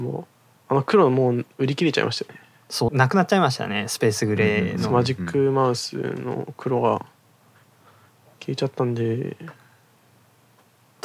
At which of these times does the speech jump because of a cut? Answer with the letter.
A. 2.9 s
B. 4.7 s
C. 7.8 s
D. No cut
A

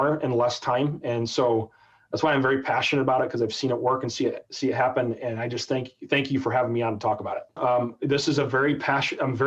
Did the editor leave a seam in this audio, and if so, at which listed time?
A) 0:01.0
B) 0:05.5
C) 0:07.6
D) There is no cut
C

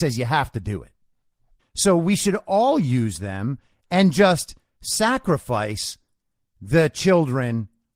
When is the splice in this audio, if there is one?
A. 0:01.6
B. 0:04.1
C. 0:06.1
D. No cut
A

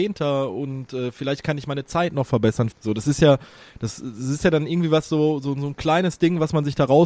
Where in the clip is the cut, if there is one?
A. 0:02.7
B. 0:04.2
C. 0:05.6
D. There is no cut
A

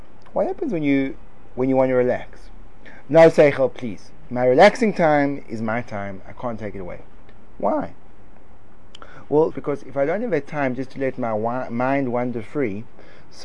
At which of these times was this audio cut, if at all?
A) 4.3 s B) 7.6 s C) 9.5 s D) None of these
C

